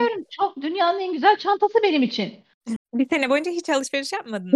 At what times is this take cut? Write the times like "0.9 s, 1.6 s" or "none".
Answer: 2.8 s